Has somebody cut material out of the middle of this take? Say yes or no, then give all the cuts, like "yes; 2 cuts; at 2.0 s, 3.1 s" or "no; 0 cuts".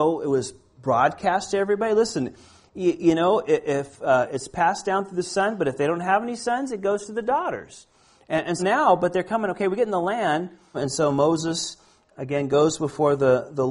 yes; 2 cuts; at 8.6 s, 10.7 s